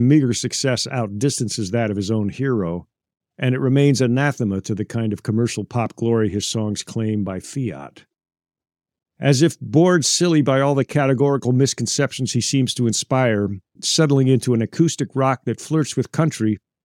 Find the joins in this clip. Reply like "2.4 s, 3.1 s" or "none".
13.8 s

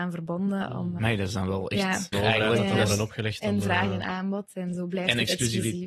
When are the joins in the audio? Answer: 1.0 s, 2.1 s

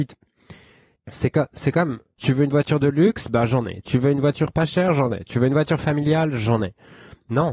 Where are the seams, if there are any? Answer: 1.0 s, 2.2 s

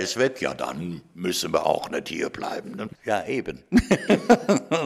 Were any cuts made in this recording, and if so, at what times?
2.9 s

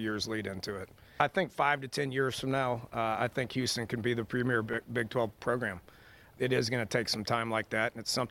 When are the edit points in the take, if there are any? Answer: none

